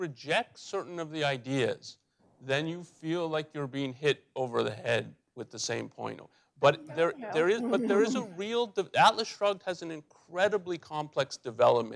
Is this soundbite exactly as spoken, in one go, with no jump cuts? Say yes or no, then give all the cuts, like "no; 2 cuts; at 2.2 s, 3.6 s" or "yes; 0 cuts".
yes; 0 cuts